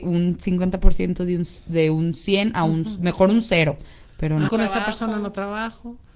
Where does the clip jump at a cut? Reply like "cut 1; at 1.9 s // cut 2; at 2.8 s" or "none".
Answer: cut 1; at 4.5 s